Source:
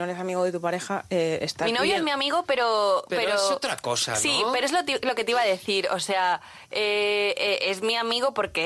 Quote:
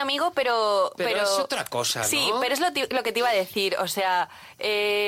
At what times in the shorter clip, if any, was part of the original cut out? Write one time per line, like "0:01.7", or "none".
none